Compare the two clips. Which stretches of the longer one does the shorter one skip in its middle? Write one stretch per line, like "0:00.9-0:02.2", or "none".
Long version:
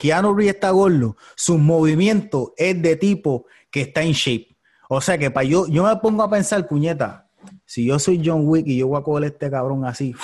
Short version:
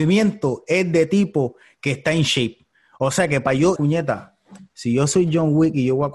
0:05.7-0:06.7